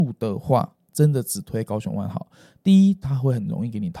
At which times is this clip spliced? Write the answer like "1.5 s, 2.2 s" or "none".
3.0 s